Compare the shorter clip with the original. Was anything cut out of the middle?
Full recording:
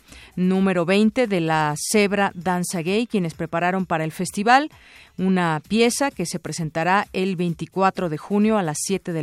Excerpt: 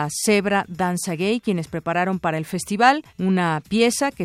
yes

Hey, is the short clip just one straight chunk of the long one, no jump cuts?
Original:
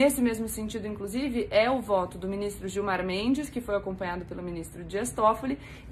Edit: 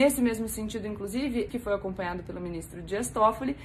no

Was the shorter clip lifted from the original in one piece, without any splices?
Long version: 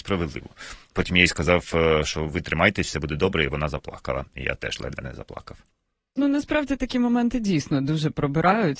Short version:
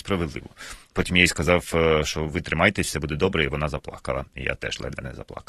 yes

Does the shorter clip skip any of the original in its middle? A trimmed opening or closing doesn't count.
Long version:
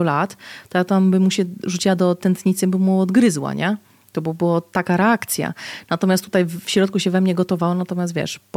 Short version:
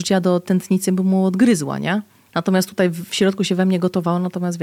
yes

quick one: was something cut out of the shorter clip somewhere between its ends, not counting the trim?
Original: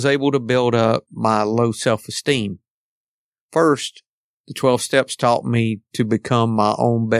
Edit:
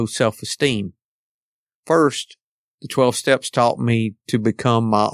no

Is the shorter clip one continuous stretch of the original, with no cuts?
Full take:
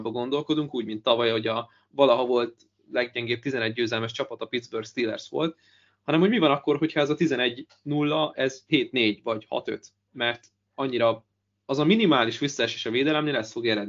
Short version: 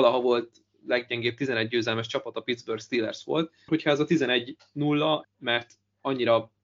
no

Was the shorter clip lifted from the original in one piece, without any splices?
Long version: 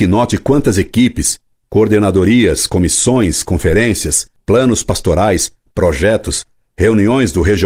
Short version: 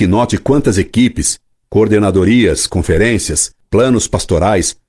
no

